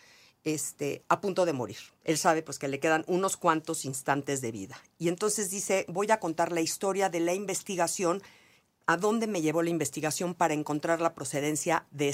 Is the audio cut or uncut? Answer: uncut